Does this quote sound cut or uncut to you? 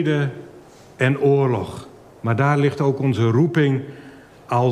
uncut